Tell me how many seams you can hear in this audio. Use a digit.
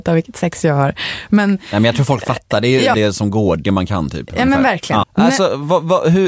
2